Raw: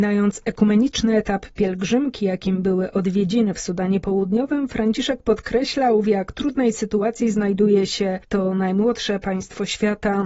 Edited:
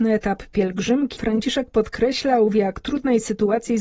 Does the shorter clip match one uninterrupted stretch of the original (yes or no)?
no